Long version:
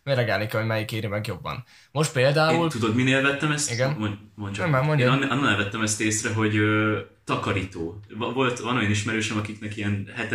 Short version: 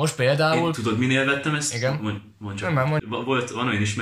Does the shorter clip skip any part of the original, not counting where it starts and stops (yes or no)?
yes